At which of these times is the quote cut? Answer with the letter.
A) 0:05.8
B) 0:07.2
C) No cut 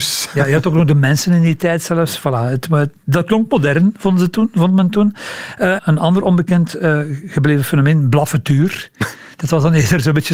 A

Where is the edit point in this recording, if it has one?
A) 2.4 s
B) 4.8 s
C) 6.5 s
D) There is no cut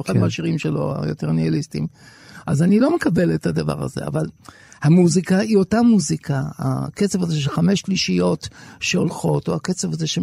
D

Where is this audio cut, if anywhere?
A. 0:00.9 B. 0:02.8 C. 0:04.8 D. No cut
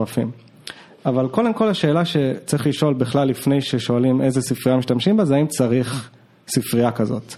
D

